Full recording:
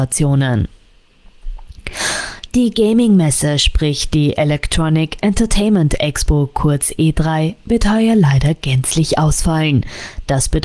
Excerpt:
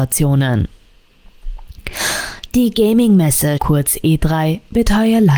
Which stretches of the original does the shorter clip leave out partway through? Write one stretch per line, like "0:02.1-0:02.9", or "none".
0:03.6-0:06.5